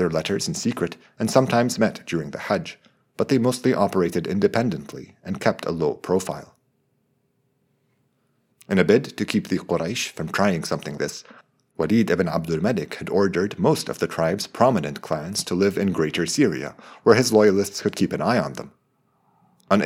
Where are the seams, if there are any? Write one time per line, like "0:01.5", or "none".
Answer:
0:08.5
0:11.0